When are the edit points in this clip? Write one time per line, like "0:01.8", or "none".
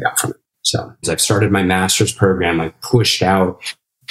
0:01.0